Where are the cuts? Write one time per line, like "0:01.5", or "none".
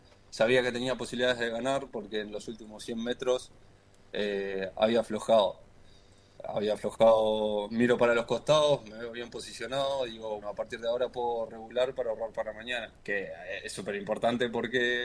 0:10.4
0:13.0